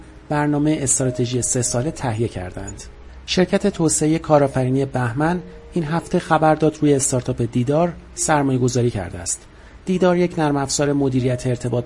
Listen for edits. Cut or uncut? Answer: uncut